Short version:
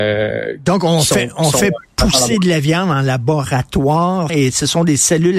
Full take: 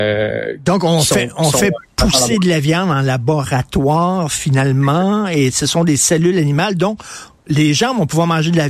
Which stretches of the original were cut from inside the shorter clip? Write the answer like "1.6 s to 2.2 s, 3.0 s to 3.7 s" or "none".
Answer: 4.3 s to 5.3 s